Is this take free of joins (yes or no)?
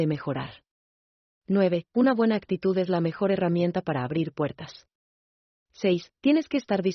no